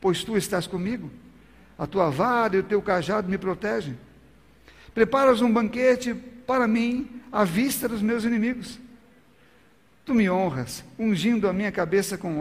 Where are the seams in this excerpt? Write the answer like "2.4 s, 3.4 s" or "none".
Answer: none